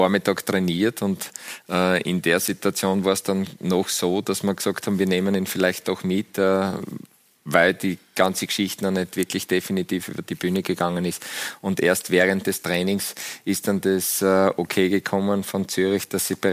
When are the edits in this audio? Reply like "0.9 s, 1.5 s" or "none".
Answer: none